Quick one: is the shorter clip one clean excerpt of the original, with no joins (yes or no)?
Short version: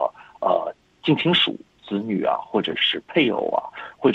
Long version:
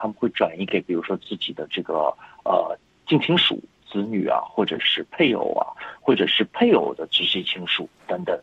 yes